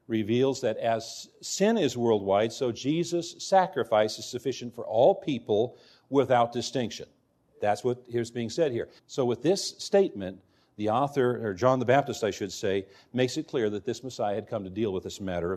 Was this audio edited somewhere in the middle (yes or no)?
yes